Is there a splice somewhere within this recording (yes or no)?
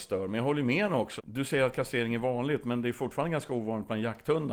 yes